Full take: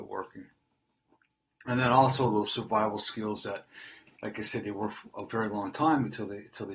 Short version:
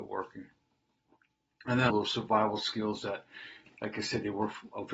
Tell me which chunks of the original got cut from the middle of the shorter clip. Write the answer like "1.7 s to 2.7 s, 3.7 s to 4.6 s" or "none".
1.9 s to 2.3 s